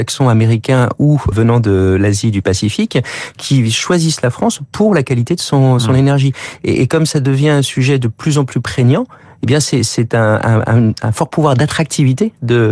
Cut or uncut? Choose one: cut